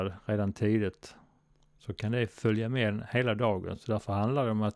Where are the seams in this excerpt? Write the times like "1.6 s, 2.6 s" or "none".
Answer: none